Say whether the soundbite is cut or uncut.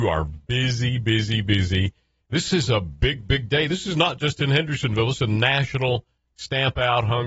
cut